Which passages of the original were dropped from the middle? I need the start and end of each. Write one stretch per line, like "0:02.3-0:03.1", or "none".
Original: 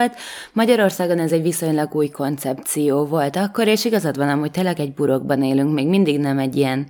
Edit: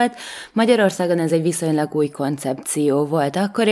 none